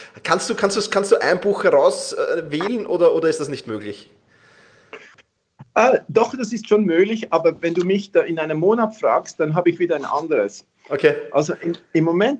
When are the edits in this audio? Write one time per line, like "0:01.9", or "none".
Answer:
none